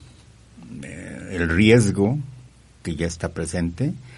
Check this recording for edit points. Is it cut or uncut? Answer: uncut